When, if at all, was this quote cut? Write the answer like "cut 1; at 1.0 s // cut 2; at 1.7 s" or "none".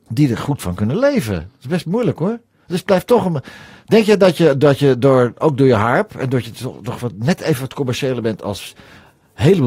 none